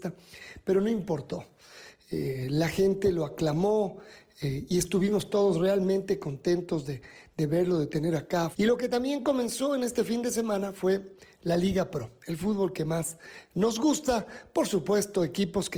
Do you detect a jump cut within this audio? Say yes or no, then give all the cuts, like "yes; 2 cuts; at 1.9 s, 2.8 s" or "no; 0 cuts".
yes; 1 cut; at 8.5 s